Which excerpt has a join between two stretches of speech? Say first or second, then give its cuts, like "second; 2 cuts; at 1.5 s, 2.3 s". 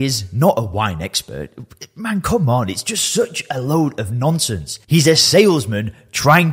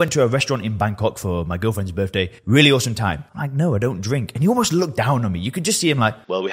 second; 1 cut; at 3.3 s